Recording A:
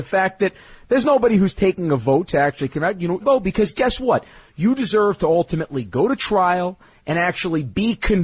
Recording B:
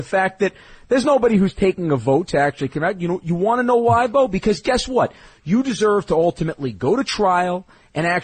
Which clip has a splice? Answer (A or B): A